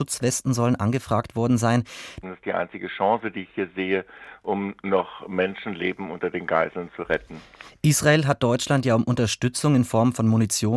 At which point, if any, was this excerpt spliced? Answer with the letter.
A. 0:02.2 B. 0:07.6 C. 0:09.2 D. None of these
A